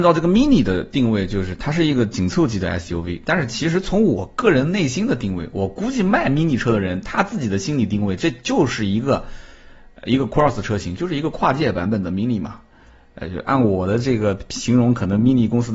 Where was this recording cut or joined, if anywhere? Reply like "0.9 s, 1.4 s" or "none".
none